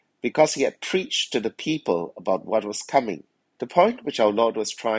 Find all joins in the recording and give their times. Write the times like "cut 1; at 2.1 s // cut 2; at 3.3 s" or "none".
cut 1; at 3.5 s